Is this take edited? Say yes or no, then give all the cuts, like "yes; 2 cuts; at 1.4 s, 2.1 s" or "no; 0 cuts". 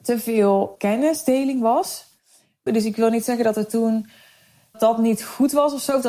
yes; 2 cuts; at 2.7 s, 4.7 s